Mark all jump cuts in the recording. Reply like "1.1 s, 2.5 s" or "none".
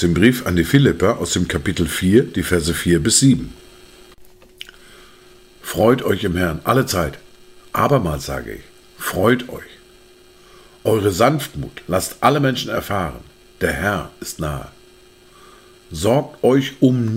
none